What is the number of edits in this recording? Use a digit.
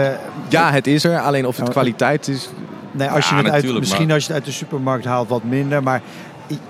0